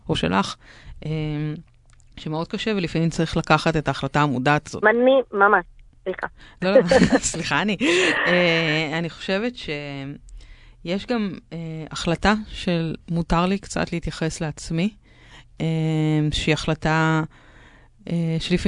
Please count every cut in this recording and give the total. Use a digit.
1